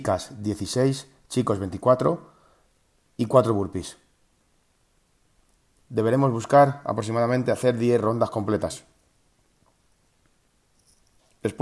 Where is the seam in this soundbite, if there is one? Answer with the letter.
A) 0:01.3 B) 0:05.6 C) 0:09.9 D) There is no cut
D